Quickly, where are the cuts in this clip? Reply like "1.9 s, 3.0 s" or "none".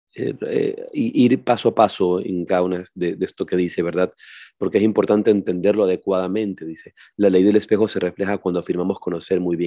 none